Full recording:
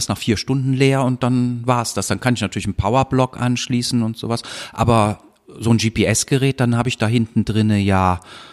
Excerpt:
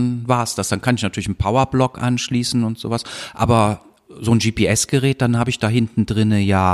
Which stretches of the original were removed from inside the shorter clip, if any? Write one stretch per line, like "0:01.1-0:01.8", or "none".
none